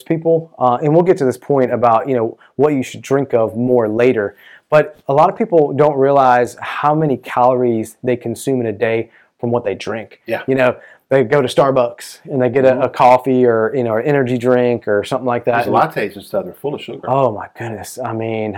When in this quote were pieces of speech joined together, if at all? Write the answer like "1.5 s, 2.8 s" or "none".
none